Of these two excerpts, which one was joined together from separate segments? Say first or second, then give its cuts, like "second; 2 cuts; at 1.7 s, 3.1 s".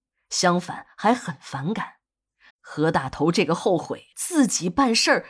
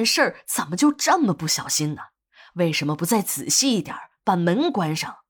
first; 2 cuts; at 2.5 s, 4.1 s